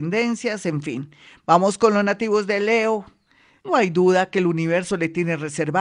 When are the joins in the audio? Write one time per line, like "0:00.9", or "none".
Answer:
0:03.6